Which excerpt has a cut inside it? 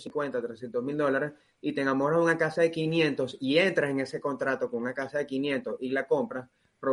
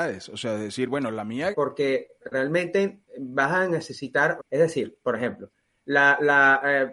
second; 2 cuts; at 1.5 s, 4.4 s

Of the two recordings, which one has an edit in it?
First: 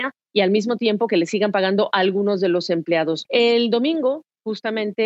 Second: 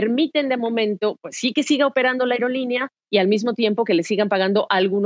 first; 1 cut; at 3.3 s

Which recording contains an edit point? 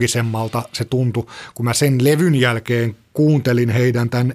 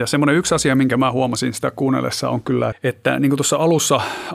second; 1 cut; at 2.7 s

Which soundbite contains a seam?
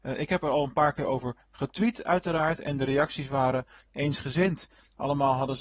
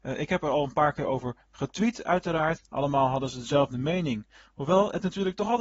second; 1 cut; at 2.6 s

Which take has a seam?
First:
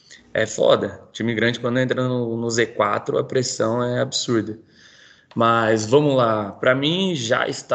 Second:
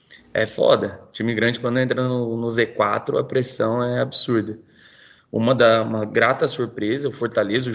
second; 1 cut; at 5.2 s

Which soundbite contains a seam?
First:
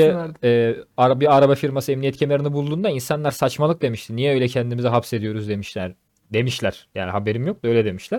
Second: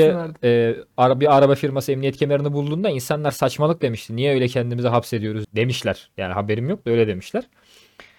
second; 1 cut; at 5.4 s

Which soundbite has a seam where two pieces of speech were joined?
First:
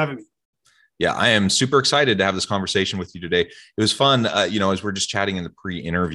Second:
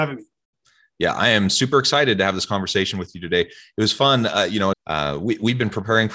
second; 1 cut; at 4.7 s

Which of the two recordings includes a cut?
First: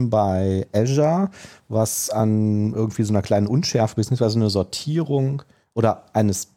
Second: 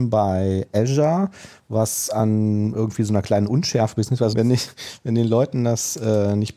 second; 1 cut; at 4.3 s

